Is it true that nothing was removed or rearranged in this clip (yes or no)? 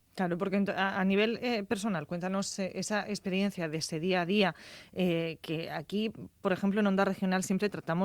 yes